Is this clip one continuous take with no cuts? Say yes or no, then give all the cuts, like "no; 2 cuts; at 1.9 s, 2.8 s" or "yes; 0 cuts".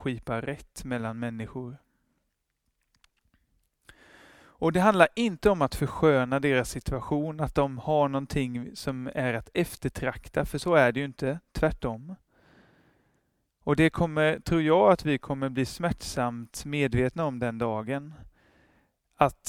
yes; 0 cuts